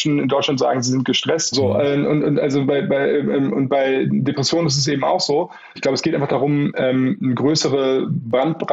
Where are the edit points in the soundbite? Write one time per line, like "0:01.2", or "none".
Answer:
0:01.5
0:05.8

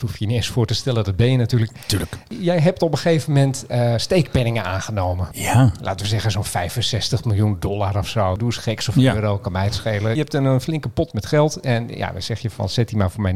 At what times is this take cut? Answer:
none

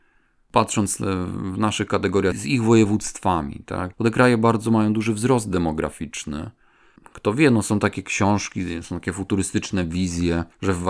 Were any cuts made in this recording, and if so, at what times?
0:03.9

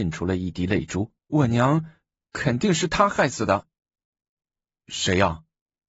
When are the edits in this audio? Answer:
0:01.2

